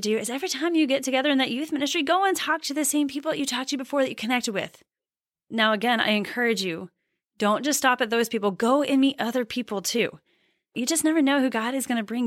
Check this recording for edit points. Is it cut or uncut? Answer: uncut